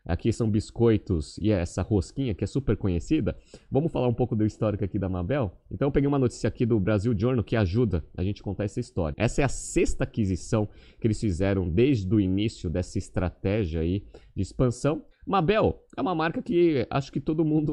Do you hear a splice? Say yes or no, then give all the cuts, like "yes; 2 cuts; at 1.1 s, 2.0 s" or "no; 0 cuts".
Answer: yes; 2 cuts; at 9.1 s, 15.1 s